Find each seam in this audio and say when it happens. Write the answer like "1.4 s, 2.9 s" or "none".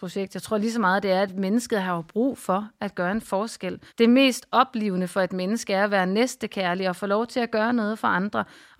3.9 s